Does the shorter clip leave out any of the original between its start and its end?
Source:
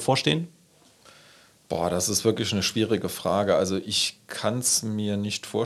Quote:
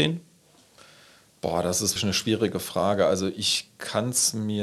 yes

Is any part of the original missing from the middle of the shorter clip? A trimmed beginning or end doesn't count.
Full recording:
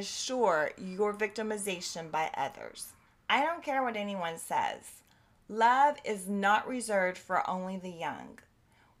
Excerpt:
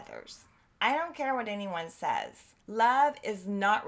yes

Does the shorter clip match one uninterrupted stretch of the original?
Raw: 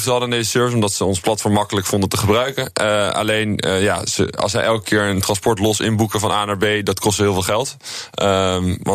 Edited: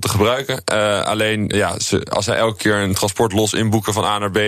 no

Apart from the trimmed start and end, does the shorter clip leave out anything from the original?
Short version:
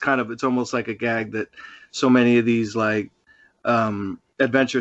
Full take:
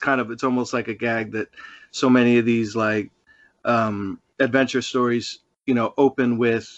no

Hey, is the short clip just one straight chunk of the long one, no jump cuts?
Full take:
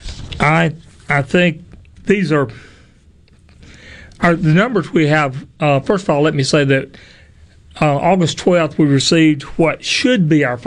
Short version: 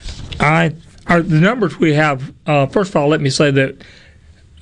no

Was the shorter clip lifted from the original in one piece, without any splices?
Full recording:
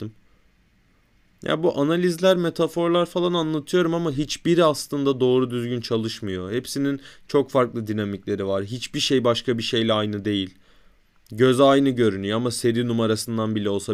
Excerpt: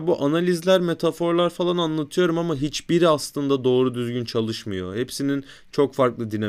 yes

